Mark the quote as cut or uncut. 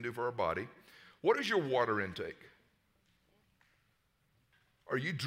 uncut